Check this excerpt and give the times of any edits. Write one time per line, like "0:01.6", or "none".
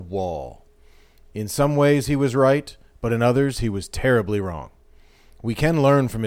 none